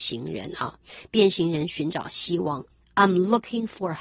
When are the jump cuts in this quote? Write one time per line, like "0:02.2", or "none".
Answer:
none